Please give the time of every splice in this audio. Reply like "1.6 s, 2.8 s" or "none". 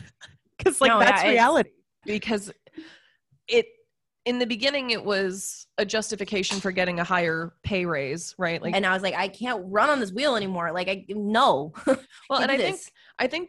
2.0 s, 8.7 s

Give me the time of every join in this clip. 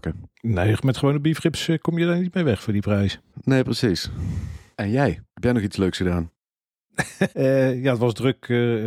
5.3 s, 7.3 s

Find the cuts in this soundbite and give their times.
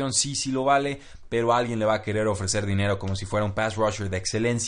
none

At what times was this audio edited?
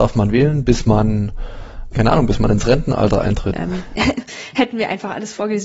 1.9 s, 3.5 s

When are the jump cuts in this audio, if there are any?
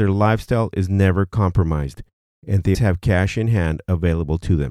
2.7 s

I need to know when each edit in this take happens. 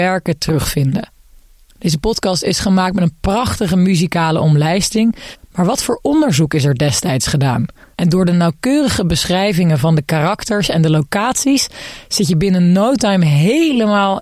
5.4 s, 7.9 s

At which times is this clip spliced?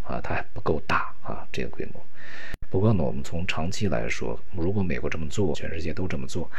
2.6 s, 5.5 s

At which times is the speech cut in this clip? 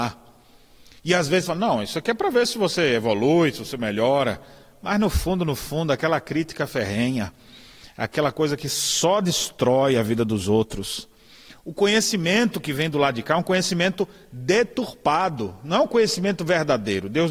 none

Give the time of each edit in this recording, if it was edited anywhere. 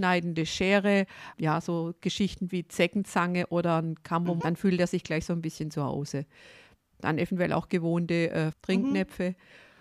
1.3 s, 4.4 s, 8.5 s

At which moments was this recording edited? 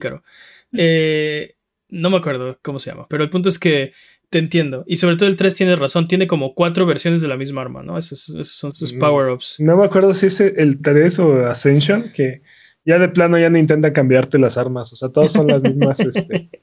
4.2 s, 8.7 s

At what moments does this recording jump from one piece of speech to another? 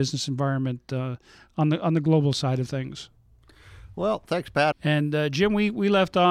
4.7 s

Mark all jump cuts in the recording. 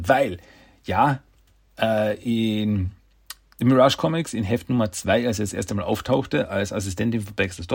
none

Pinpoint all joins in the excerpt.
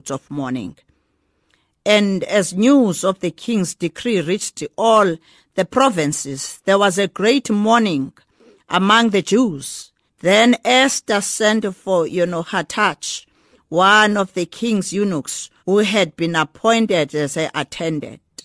10.1 s, 15.6 s

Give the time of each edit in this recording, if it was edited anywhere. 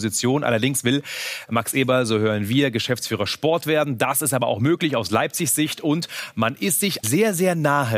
7.0 s

